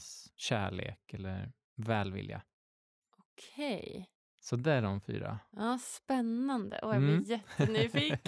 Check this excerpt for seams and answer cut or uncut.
uncut